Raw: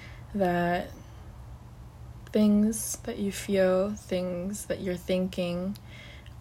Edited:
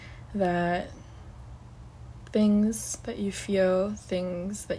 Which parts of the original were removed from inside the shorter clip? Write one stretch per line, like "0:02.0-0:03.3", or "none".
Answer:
none

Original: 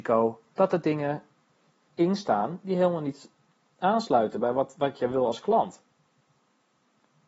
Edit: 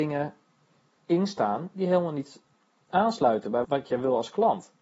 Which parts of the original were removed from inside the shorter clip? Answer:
0:04.5-0:04.7

